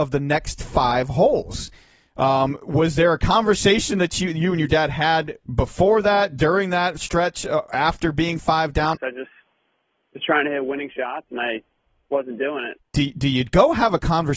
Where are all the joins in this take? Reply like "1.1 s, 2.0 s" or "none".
8.9 s, 12.8 s